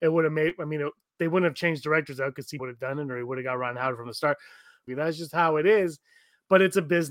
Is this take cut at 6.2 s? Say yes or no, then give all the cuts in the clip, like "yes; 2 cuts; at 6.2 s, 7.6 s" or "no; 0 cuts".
no; 2 cuts; at 2.6 s, 4.9 s